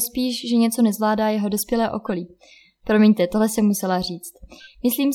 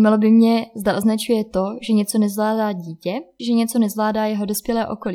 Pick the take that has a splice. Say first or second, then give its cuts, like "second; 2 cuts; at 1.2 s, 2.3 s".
second; 1 cut; at 3.4 s